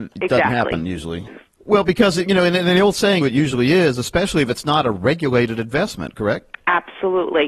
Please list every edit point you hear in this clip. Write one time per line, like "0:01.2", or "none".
0:01.3
0:03.2